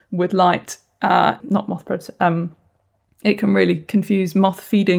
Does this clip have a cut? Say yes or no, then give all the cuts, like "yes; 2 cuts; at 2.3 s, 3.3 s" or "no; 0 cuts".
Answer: yes; 1 cut; at 1.4 s